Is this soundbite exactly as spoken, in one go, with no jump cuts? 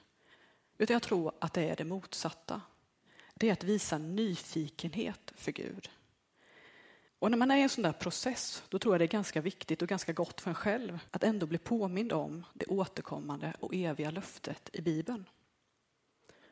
no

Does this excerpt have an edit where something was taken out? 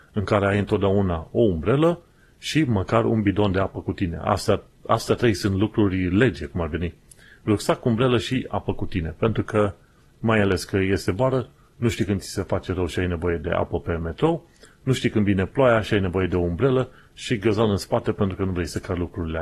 no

